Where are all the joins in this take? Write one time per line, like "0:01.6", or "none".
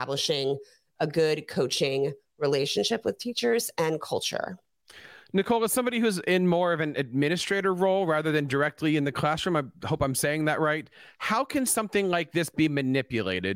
none